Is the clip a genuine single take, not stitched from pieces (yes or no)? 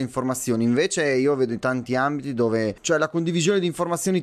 yes